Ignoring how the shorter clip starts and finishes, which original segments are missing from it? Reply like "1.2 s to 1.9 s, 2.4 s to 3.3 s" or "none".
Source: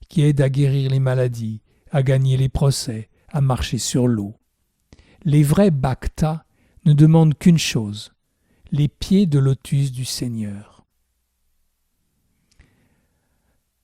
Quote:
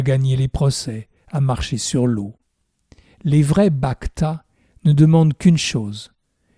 none